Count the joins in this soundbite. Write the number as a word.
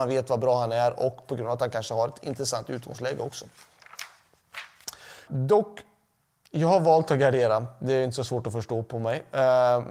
one